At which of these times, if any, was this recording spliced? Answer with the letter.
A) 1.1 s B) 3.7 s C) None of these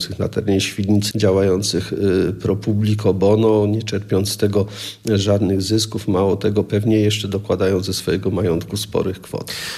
A